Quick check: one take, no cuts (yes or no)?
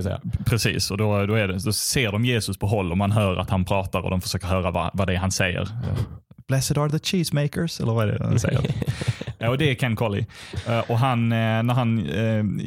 yes